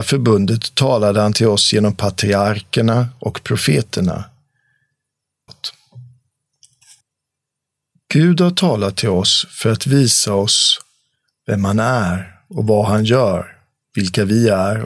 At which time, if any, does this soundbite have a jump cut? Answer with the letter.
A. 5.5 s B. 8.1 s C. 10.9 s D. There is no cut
A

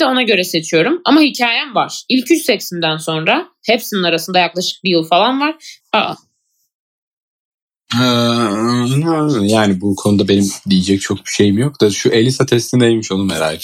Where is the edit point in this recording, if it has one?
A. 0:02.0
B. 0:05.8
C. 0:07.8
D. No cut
B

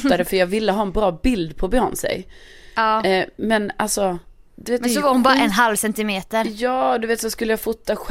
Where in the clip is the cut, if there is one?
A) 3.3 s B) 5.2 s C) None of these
C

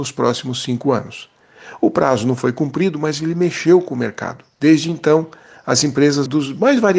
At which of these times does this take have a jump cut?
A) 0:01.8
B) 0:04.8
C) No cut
C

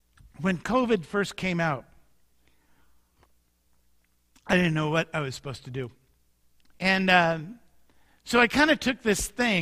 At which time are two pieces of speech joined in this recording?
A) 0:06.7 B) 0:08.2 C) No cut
A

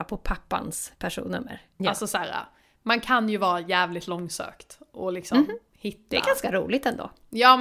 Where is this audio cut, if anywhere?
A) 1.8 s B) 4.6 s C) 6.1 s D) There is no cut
A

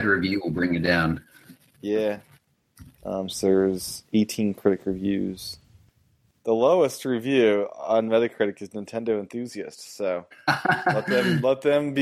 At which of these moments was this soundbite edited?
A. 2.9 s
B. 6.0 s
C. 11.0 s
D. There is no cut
A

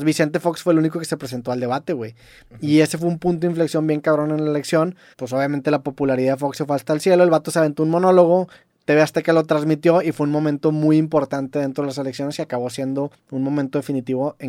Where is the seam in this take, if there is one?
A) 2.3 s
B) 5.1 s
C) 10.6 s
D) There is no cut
B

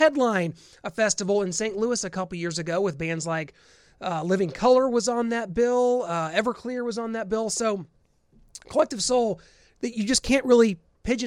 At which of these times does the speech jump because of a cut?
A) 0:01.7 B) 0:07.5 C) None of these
C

